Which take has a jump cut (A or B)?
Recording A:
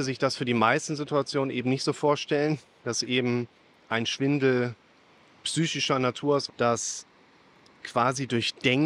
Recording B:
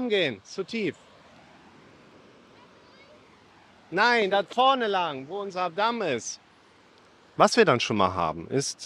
A